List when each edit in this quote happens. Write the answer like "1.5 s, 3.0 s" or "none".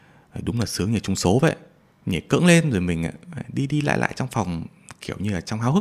none